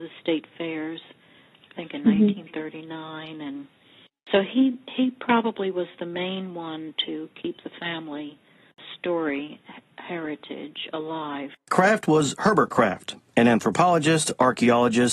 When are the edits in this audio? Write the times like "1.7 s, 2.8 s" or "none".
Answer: none